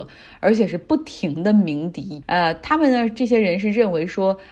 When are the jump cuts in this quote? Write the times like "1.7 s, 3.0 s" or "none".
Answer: 2.2 s